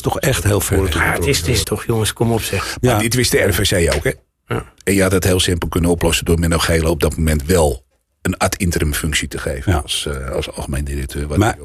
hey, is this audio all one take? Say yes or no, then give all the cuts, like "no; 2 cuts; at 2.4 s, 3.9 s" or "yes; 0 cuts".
no; 1 cut; at 1.6 s